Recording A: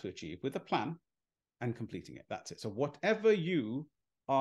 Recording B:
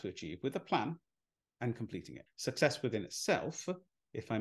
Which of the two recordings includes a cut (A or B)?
B